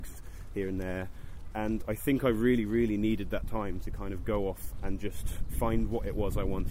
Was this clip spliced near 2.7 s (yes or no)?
no